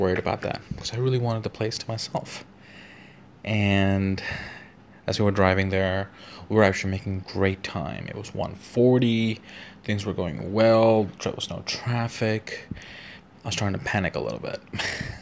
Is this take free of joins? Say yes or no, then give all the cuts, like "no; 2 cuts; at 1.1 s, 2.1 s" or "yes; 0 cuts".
yes; 0 cuts